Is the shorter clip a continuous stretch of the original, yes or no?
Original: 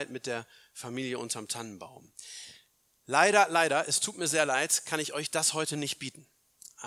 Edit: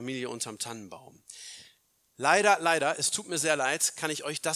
yes